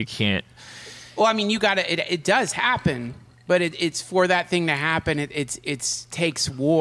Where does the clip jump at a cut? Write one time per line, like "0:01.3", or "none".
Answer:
none